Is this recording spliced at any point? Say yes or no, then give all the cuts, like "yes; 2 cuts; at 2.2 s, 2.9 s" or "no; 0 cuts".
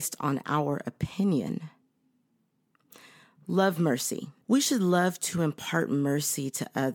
yes; 1 cut; at 4.4 s